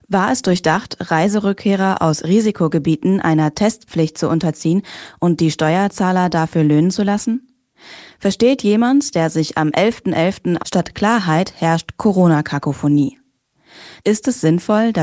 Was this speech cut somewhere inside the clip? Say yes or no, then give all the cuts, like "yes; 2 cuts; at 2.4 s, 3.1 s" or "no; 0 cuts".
yes; 2 cuts; at 10.6 s, 14.0 s